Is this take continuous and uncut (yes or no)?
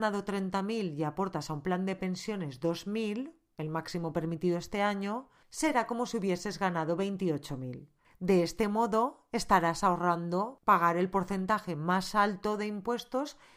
yes